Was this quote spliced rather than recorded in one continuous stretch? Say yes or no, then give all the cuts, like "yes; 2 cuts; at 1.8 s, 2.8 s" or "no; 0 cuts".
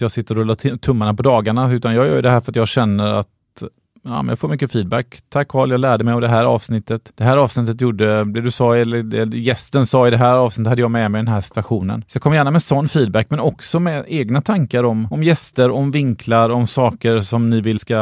no; 0 cuts